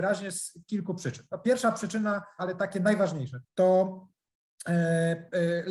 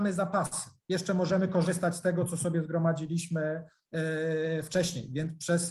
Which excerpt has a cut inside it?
first; 2 cuts; at 2.4 s, 3.4 s

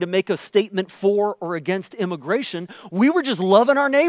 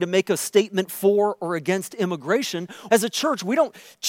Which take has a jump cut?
second; 1 cut; at 2.9 s

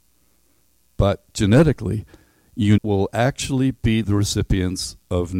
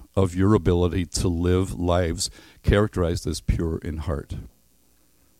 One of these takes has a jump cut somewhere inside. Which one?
first; 1 cut; at 2.8 s

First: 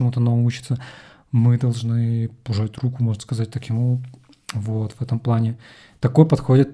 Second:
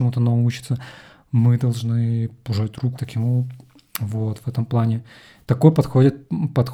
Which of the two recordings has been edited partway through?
second; 1 cut; at 3.0 s

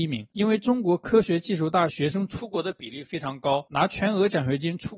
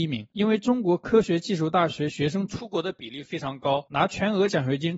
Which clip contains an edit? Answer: first; 1 cut; at 1.9 s

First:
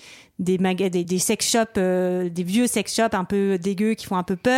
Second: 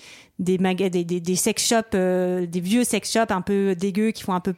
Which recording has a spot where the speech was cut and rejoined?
first; 1 cut; at 1.0 s

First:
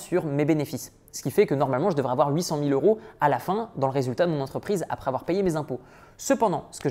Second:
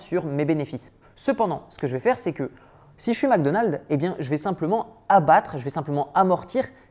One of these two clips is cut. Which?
second; 1 cut; at 1.0 s

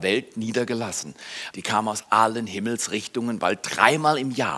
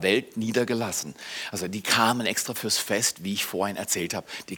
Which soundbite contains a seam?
first; 1 cut; at 1.5 s

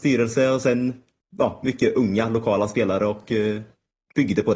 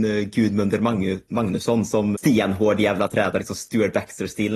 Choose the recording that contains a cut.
second; 1 cut; at 2.1 s

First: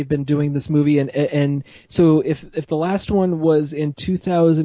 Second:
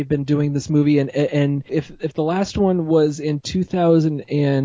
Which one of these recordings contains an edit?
second; 1 cut; at 1.7 s

